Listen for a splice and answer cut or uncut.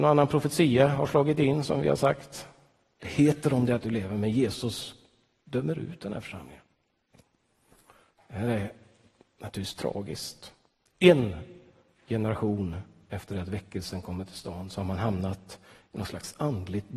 uncut